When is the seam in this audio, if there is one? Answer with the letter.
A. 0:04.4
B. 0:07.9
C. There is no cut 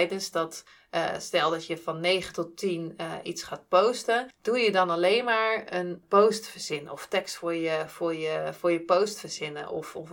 C